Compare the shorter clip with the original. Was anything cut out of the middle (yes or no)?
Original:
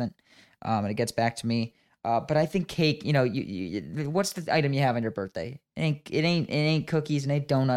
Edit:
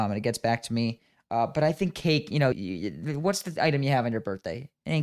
yes